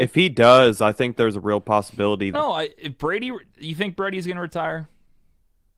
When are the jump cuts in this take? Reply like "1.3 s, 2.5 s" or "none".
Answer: 2.3 s